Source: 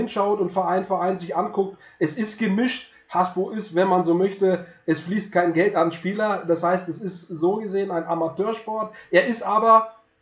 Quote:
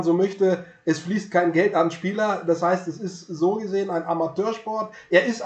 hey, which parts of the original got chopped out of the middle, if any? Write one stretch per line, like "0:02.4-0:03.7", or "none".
none